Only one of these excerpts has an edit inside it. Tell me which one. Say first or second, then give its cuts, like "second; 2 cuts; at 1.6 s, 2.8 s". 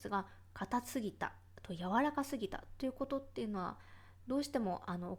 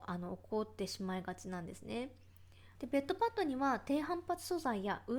second; 1 cut; at 2.8 s